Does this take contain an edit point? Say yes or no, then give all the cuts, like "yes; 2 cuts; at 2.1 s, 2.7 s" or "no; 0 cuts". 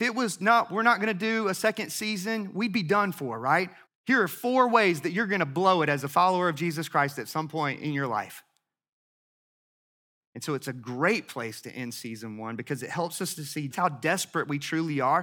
yes; 3 cuts; at 3.9 s, 10.2 s, 13.7 s